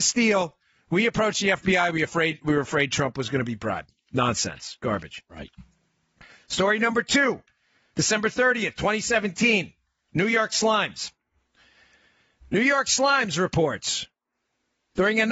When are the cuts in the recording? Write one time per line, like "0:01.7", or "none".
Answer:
none